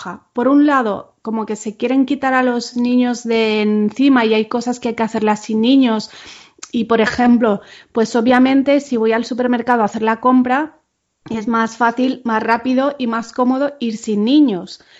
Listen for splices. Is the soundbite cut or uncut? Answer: uncut